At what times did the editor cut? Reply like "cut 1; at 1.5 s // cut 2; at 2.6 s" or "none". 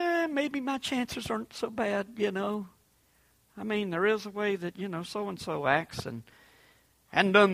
none

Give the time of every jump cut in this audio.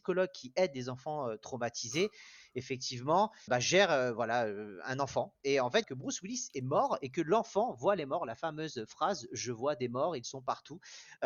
cut 1; at 3.5 s // cut 2; at 5.8 s

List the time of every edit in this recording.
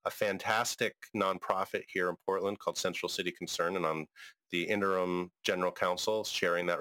none

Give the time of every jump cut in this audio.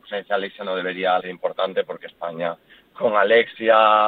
cut 1; at 1.2 s

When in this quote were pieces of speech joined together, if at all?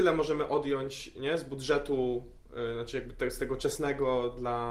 none

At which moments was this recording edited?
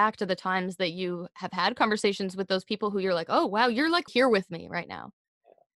cut 1; at 4.1 s

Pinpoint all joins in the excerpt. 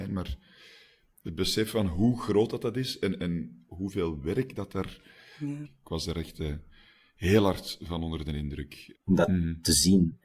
cut 1; at 5.6 s // cut 2; at 8.9 s

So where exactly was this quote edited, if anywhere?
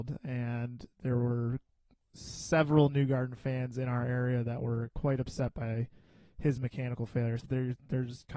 cut 1; at 7.4 s

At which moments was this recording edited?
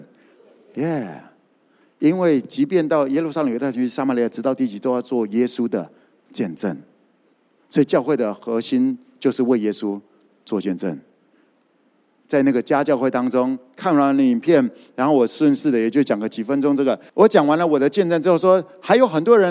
none

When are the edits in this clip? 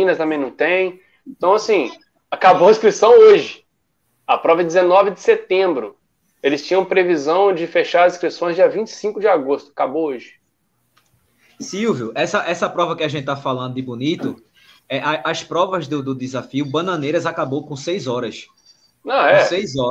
none

